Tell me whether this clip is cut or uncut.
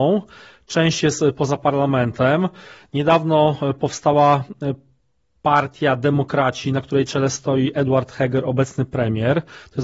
uncut